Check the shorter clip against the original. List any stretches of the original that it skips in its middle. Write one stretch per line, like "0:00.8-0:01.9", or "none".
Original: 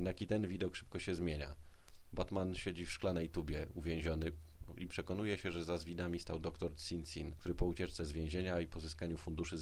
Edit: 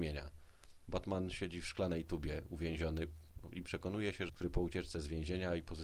0:05.5-0:07.3